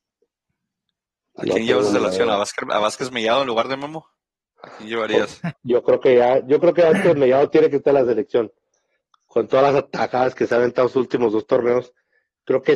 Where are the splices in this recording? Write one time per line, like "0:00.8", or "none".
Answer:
none